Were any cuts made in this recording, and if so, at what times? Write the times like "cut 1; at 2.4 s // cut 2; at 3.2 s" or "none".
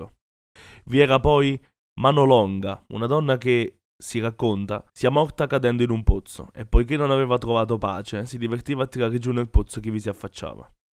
cut 1; at 2.9 s // cut 2; at 4.9 s